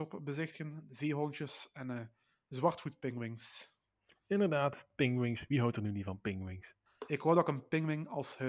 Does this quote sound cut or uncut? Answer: cut